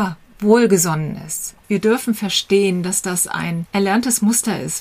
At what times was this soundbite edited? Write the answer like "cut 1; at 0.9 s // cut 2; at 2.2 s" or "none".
cut 1; at 1.6 s